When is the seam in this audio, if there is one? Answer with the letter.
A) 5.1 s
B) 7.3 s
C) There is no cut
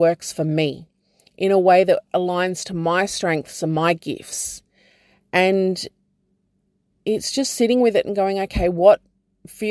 C